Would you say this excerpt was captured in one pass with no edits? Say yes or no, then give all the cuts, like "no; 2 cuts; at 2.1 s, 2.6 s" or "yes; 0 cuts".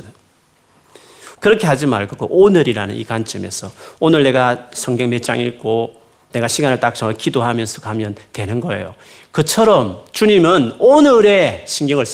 no; 1 cut; at 1.3 s